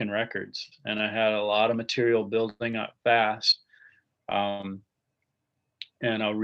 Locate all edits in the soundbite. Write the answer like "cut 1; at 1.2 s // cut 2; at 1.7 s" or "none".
none